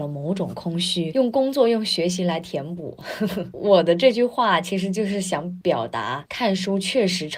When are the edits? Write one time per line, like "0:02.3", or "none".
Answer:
0:01.1